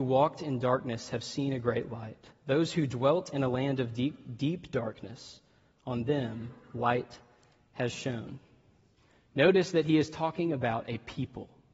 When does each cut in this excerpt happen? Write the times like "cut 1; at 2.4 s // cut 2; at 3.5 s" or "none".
none